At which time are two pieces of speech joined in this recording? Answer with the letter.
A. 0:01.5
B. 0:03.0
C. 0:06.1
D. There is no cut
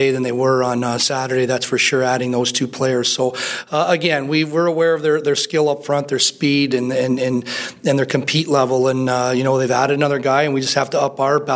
D